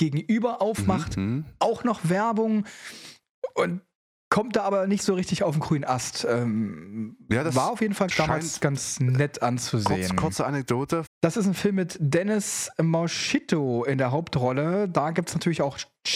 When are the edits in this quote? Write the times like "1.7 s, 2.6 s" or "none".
8.1 s, 11.1 s